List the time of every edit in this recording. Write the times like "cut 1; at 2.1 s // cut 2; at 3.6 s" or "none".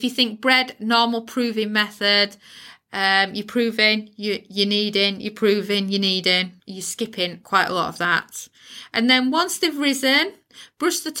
cut 1; at 6.6 s